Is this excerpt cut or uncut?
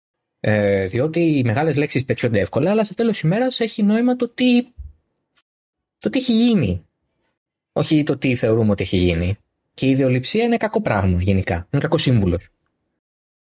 uncut